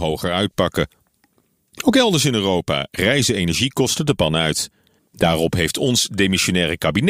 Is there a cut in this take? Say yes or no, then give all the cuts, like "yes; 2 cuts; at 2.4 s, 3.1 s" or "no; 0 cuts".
yes; 1 cut; at 5.0 s